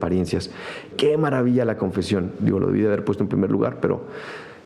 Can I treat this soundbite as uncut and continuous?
no; 1 cut; at 0.9 s

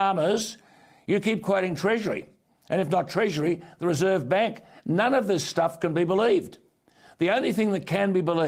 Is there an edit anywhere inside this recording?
no; 0 cuts

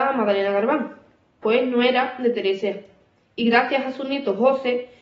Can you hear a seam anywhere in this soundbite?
yes; 1 cut; at 1.4 s

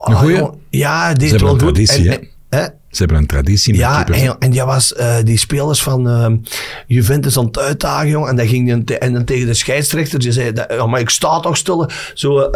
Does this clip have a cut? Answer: no; 0 cuts

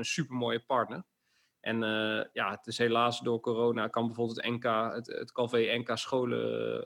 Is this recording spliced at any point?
no; 0 cuts

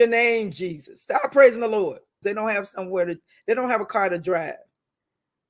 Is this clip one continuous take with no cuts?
no; 1 cut; at 2.2 s

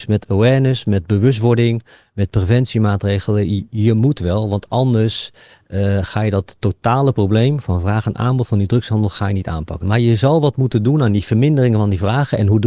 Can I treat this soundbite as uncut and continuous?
no; 1 cut; at 9.8 s

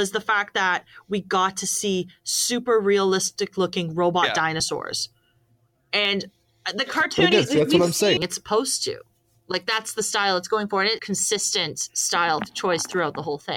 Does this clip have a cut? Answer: yes; 2 cuts; at 8.2 s, 11.0 s

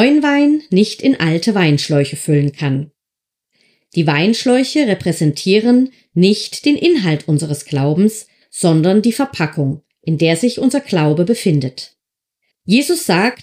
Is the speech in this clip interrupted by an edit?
yes; 1 cut; at 12.5 s

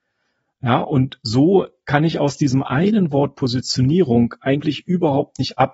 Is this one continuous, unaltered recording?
yes; 0 cuts

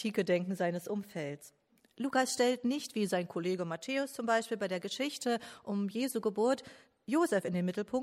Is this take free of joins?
yes; 0 cuts

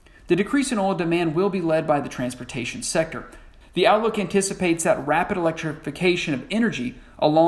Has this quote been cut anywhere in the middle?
yes; 1 cut; at 3.6 s

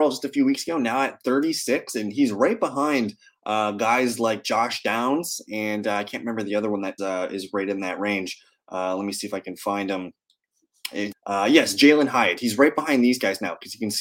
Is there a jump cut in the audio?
yes; 2 cuts; at 7.0 s, 11.1 s

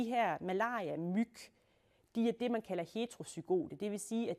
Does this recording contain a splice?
no; 0 cuts

